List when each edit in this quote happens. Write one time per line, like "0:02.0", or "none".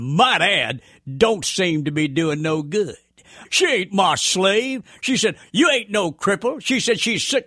0:03.4